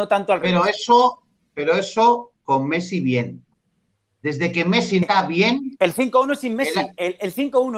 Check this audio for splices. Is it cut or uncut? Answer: cut